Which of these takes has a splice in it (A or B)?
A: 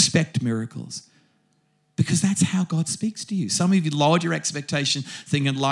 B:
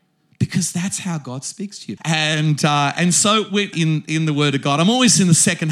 B